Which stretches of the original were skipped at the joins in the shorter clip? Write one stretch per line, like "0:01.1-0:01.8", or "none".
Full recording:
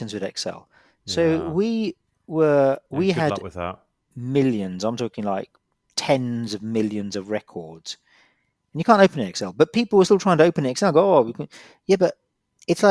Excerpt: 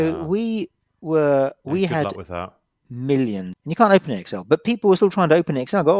0:04.8-0:08.6